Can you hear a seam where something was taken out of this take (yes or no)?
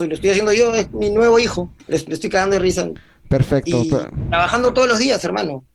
yes